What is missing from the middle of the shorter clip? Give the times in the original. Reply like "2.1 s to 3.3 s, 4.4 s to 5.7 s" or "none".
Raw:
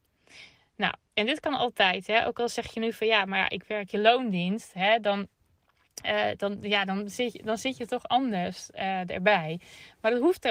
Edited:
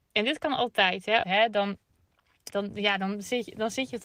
2.2 s to 4.7 s, 6.0 s to 6.4 s